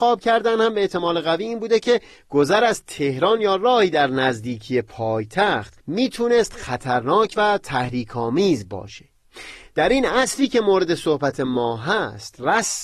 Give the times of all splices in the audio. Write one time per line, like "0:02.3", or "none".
0:05.8